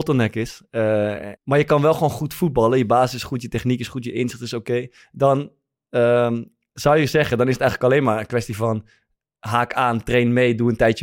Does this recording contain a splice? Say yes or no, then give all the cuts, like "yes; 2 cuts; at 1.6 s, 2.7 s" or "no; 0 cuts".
yes; 1 cut; at 1.4 s